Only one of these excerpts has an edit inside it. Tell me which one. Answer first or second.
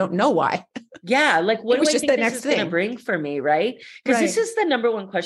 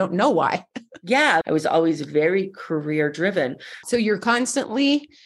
second